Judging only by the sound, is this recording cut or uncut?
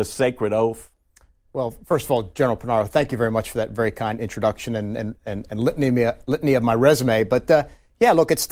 uncut